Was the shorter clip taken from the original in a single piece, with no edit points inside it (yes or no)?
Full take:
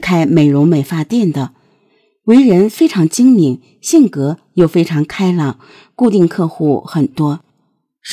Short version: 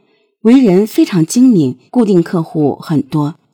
no